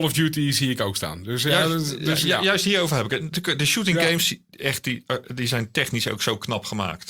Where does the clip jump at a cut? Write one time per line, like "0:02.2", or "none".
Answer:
none

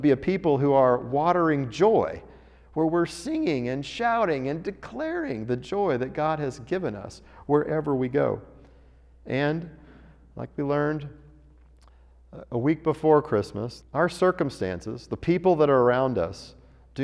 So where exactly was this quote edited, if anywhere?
0:13.8

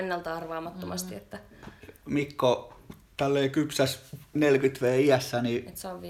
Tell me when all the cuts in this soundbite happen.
none

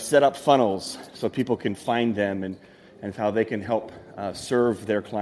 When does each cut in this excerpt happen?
none

